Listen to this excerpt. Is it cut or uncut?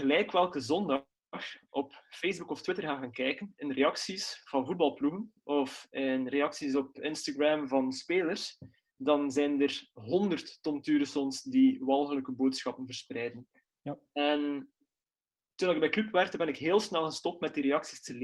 uncut